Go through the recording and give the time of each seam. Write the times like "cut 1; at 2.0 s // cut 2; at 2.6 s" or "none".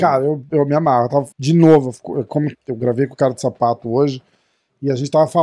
cut 1; at 1.3 s // cut 2; at 2.5 s